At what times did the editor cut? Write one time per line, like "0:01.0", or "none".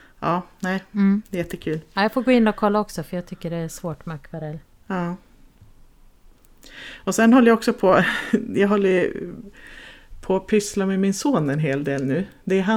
none